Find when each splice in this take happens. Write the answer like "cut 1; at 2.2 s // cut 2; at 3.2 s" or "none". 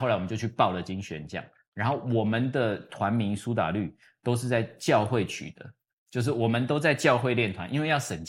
none